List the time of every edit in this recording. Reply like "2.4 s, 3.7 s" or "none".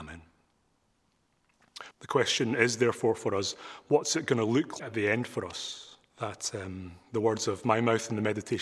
1.9 s, 4.8 s, 6.1 s

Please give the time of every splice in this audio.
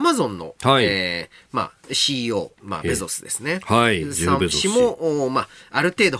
none

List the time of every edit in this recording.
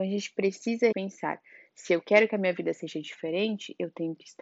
0.9 s

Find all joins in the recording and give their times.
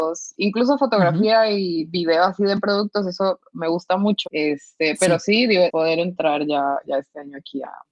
4.2 s, 5.7 s

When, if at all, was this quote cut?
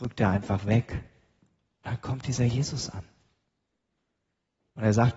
none

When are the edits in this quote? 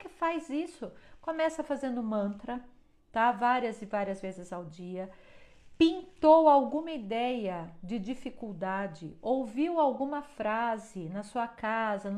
none

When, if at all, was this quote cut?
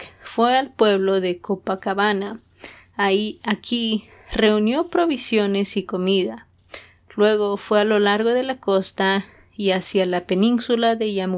none

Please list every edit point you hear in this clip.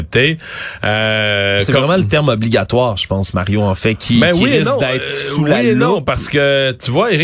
none

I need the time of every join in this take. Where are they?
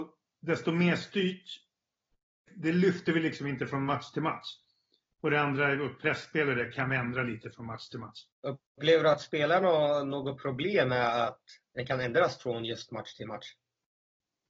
2.5 s, 8.3 s

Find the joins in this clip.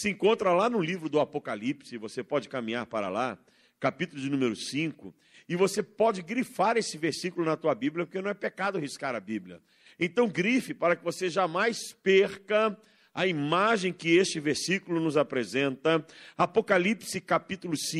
none

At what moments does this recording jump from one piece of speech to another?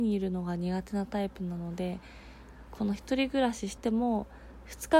2.7 s, 3.8 s

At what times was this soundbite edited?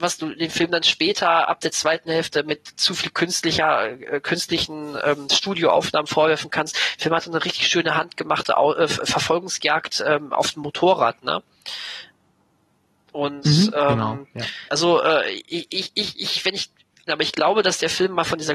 14.7 s, 17.1 s

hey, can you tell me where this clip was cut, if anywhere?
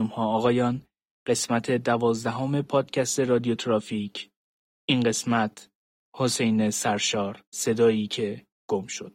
7.5 s

